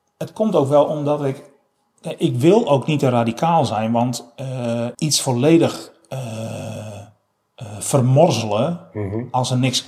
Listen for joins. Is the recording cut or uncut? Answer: cut